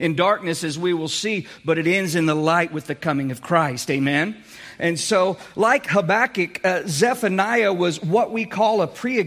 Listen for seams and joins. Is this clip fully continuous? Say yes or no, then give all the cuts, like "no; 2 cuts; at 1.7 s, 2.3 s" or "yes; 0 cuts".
yes; 0 cuts